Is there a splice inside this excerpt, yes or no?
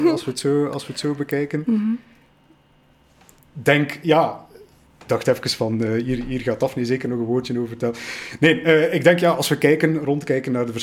no